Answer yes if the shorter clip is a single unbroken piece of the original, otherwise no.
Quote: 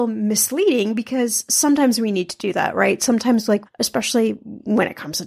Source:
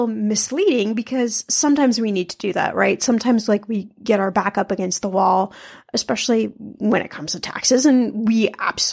no